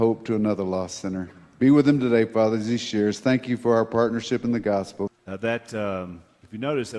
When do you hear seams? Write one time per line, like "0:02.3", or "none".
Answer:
0:05.1